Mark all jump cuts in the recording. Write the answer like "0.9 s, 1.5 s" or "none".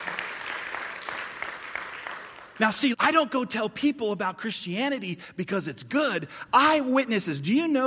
2.9 s, 6.5 s